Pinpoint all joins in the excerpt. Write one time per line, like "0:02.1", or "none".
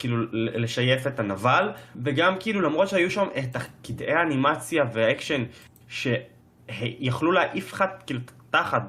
0:01.9